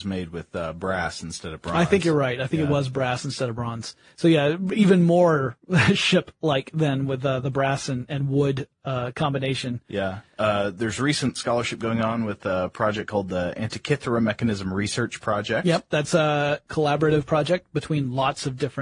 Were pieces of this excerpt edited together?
no; 0 cuts

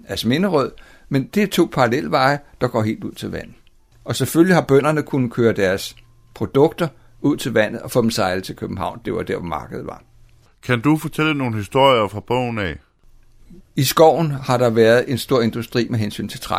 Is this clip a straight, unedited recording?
no; 1 cut; at 3.9 s

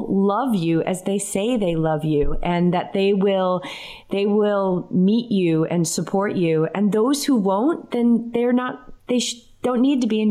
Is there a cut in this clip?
no; 0 cuts

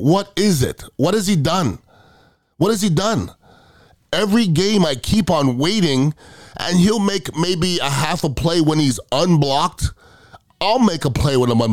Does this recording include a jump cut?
no; 0 cuts

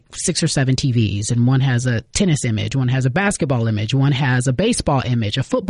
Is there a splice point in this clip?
no; 0 cuts

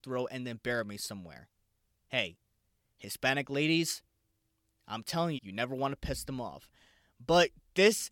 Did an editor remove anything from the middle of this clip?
yes; 1 cut; at 5.4 s

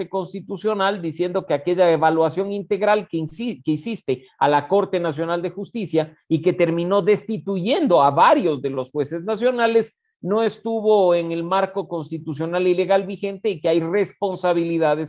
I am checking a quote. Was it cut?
no; 0 cuts

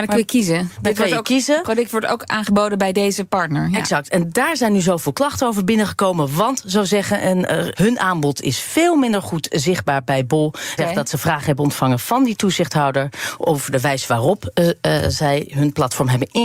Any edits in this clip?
yes; 2 cuts; at 7.7 s, 10.8 s

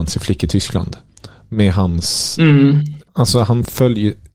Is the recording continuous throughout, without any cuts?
no; 1 cut; at 3.1 s

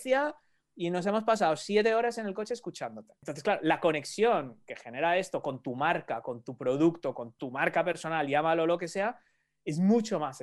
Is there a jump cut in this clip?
yes; 1 cut; at 7.1 s

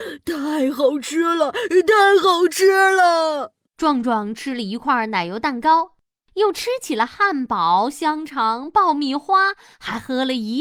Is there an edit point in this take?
no; 0 cuts

